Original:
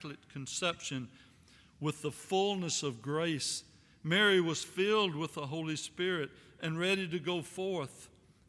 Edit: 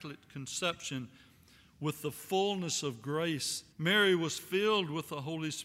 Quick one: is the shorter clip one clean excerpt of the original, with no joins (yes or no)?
no